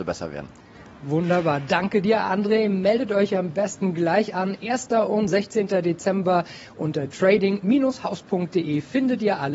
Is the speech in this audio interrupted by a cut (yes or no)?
no